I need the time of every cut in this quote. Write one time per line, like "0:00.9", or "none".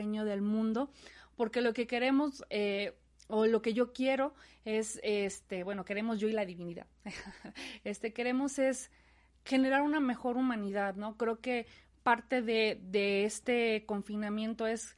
none